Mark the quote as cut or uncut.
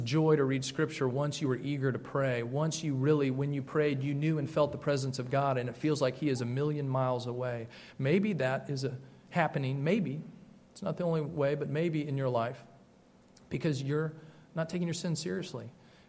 uncut